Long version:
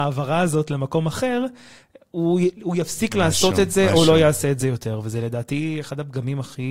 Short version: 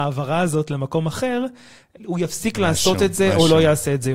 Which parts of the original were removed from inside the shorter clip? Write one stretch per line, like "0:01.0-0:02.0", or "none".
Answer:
0:02.0-0:02.5